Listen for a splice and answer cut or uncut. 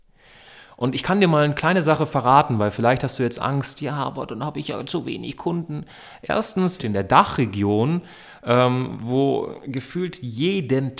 cut